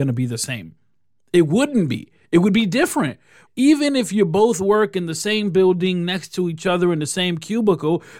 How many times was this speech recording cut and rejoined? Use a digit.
1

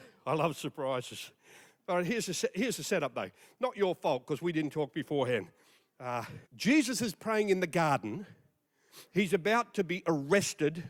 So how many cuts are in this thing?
1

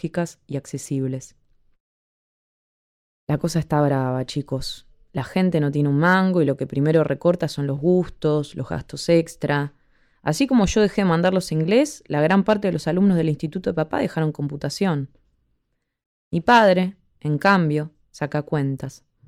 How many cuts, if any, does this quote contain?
0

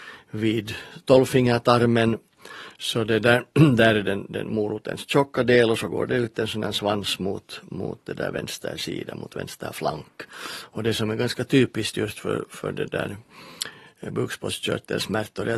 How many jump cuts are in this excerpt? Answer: 0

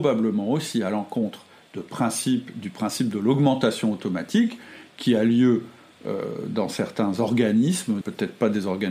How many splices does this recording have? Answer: 1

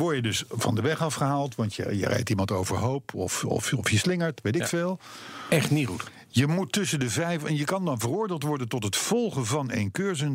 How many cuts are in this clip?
0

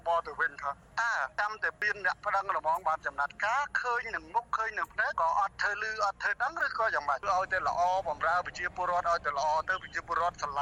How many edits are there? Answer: 1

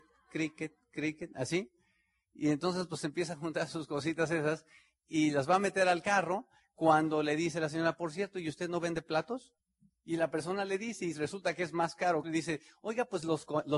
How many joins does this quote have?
2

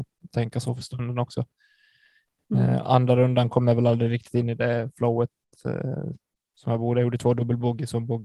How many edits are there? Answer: 0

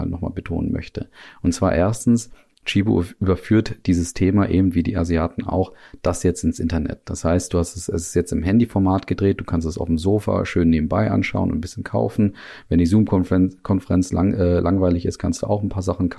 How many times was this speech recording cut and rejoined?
0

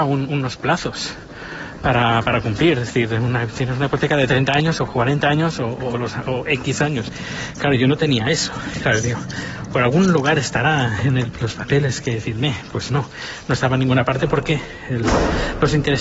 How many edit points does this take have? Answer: 0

